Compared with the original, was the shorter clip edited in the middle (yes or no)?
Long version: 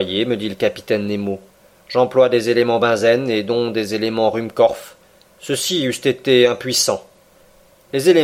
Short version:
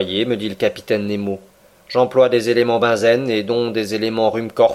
no